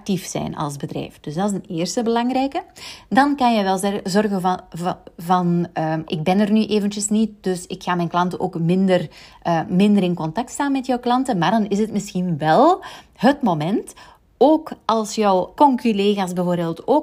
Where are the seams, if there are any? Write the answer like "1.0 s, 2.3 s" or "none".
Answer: 6.0 s, 15.5 s

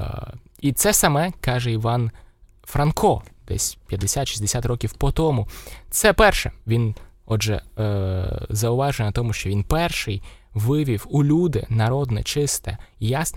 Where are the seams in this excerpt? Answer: none

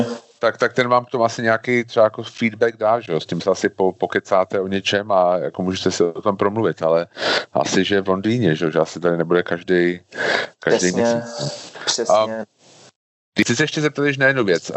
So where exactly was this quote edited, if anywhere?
none

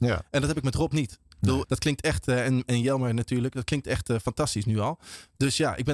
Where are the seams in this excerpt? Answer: 1.6 s

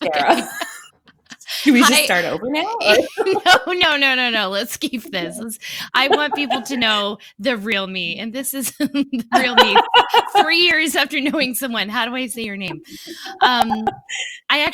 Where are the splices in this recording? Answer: none

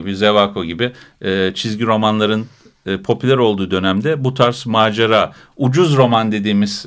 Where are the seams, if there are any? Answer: none

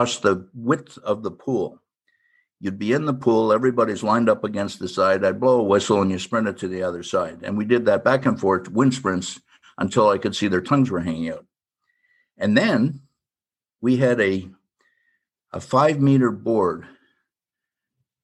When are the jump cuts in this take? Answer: none

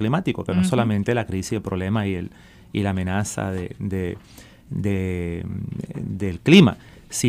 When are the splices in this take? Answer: none

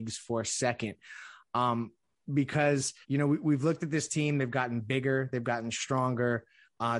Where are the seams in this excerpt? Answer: 3.0 s

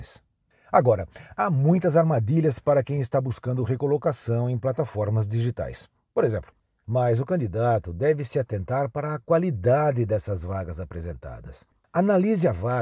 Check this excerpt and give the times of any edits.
6.8 s

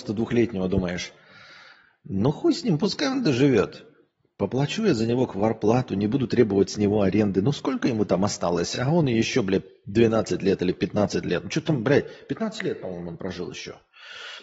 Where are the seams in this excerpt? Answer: none

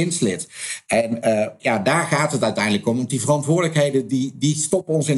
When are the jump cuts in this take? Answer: none

